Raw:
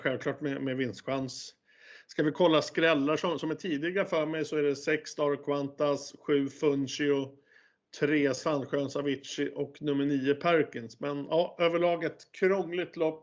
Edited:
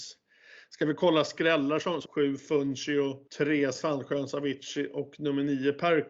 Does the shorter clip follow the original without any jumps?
no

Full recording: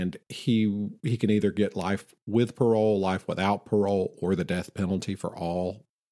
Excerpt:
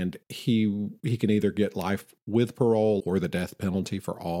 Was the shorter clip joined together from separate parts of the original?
yes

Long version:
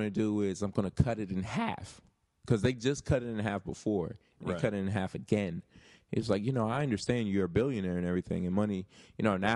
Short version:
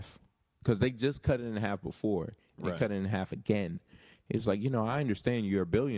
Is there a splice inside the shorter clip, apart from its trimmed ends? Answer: no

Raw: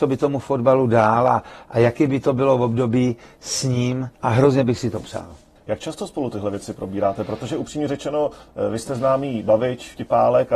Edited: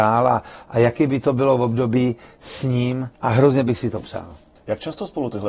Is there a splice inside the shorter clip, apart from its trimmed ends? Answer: no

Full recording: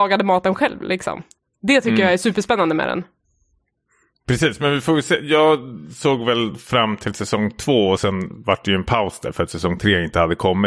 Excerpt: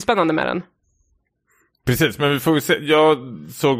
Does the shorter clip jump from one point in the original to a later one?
no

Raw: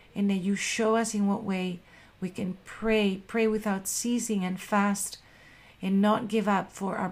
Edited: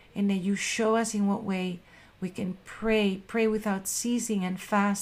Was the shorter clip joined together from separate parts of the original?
no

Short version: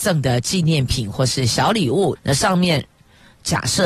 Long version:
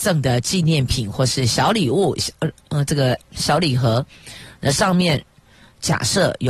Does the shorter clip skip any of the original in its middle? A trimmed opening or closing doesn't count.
yes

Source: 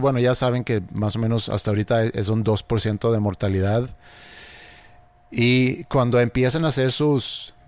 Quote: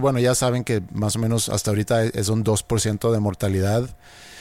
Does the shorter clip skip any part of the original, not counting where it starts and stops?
no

